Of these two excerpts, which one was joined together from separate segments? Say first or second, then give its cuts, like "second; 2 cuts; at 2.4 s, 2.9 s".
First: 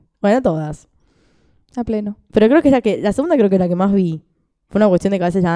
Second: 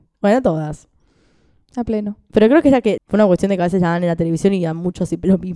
second; 1 cut; at 3.0 s